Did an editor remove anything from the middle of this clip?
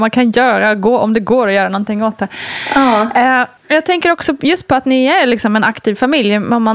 yes; 1 cut; at 3.6 s

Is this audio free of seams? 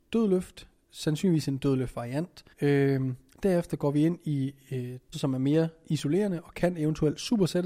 no; 2 cuts; at 2.5 s, 5.1 s

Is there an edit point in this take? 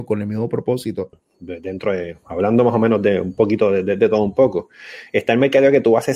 yes; 1 cut; at 1.1 s

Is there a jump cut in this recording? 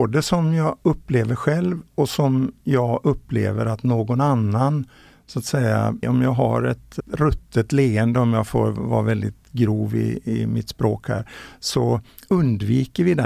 yes; 1 cut; at 6.0 s

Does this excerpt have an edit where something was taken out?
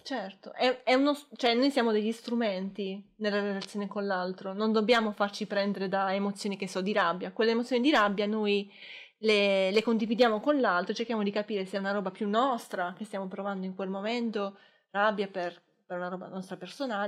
no; 0 cuts

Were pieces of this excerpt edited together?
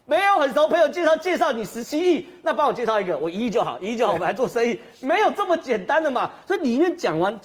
no; 0 cuts

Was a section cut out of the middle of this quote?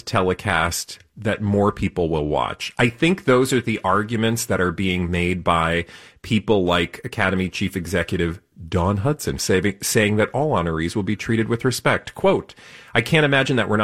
yes; 1 cut; at 9.4 s

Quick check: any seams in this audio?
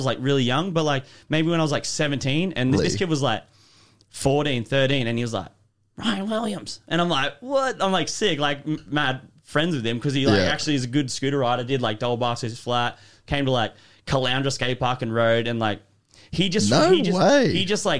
yes; 1 cut; at 2.8 s

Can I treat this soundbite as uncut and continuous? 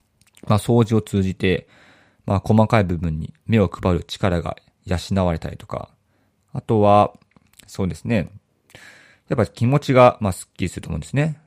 yes; 0 cuts

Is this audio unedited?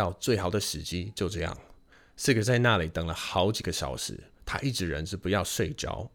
yes; 0 cuts

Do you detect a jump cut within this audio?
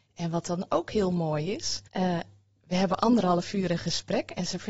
yes; 1 cut; at 1.9 s

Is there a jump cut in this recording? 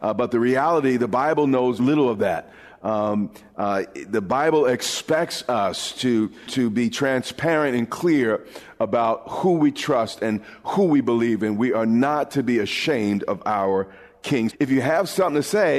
yes; 2 cuts; at 1.8 s, 14.5 s

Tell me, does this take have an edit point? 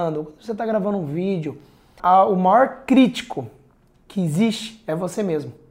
yes; 1 cut; at 2.0 s

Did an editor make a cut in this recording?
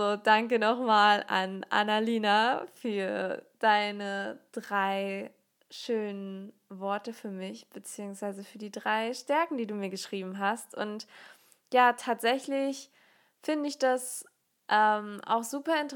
no; 0 cuts

